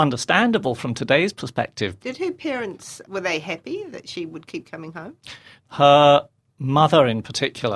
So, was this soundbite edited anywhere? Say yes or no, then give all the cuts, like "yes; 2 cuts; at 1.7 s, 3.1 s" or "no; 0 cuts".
yes; 3 cuts; at 2.0 s, 3.0 s, 5.6 s